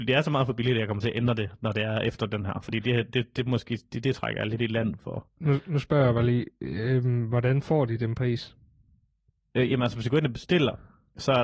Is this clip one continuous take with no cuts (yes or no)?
yes